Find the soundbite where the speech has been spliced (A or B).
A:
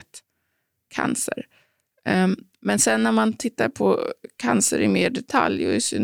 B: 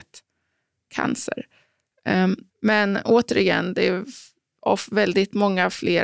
B